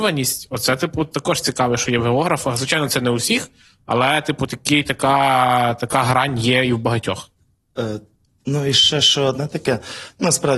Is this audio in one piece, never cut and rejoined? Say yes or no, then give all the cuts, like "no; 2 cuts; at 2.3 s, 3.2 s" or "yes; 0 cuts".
yes; 0 cuts